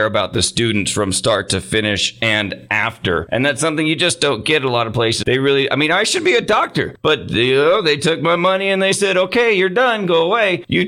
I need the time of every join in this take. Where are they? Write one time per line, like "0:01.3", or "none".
0:05.2